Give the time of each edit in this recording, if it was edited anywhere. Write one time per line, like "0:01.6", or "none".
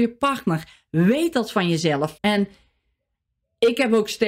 0:02.2